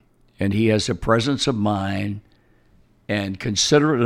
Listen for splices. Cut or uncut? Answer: uncut